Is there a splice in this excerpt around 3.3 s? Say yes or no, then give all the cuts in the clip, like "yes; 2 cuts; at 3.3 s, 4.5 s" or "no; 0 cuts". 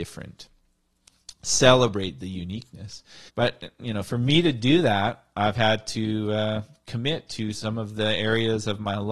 yes; 1 cut; at 3.3 s